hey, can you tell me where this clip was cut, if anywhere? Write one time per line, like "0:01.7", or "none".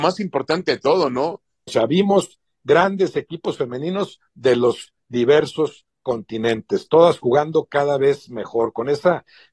0:01.7